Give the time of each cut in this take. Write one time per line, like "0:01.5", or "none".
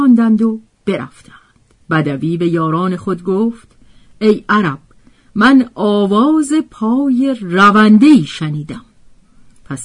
0:01.8